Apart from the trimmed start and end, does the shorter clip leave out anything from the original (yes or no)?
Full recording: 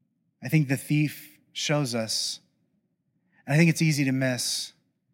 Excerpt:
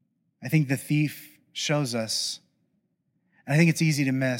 no